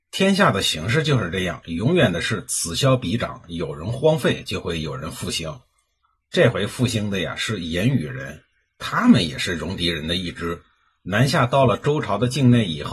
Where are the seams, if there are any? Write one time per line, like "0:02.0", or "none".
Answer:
none